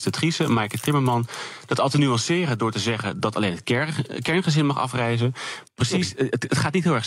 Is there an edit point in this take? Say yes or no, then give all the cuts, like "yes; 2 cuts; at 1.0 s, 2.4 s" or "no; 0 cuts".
yes; 1 cut; at 5.7 s